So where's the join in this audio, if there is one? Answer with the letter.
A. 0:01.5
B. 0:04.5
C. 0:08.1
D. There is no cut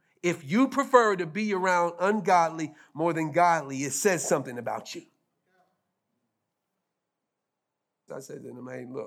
C